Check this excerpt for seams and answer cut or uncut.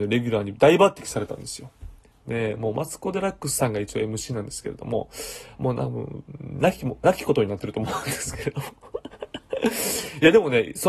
cut